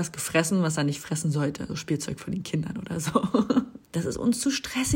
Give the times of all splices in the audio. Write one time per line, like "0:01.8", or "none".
0:01.7
0:03.8